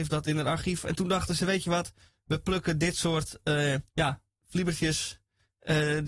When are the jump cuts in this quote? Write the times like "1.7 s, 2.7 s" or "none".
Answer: 3.9 s